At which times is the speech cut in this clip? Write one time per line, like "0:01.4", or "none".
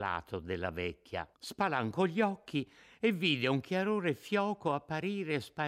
0:01.3